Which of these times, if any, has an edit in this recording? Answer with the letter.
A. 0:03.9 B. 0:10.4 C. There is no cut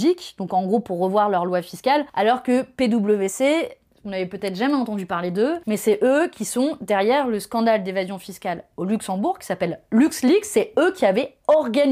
C